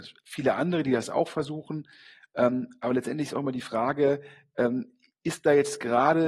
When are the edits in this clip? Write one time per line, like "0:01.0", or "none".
none